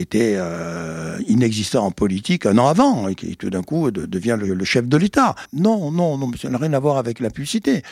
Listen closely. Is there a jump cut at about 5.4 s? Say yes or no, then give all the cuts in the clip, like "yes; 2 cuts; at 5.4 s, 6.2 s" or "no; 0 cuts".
yes; 1 cut; at 5.4 s